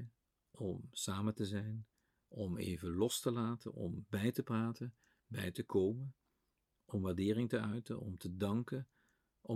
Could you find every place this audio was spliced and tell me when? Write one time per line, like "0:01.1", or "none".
none

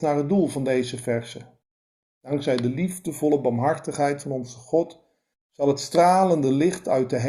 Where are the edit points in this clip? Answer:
none

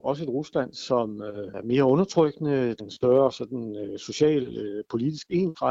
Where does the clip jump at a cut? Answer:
0:02.8

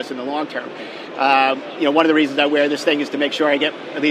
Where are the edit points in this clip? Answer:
0:01.1

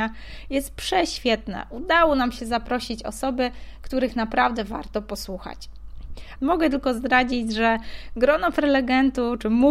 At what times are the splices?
0:06.4

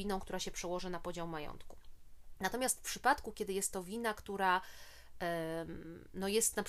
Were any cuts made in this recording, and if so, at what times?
none

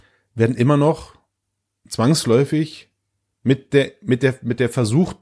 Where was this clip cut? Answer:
none

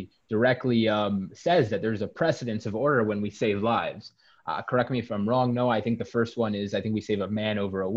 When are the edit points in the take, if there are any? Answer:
none

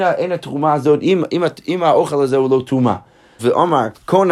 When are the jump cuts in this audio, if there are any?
0:03.4

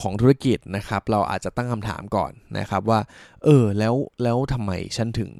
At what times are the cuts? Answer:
none

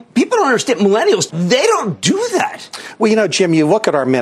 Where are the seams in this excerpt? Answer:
0:01.3

